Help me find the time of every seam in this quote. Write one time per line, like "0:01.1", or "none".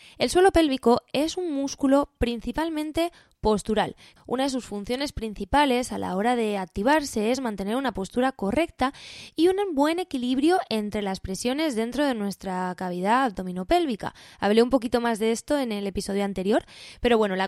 0:04.2